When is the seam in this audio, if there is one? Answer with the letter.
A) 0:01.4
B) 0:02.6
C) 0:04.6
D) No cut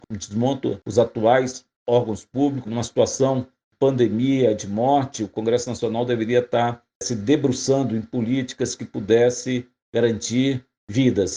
B